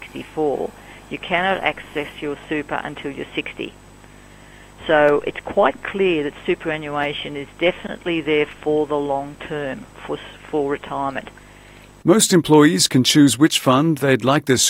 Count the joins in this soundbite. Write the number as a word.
one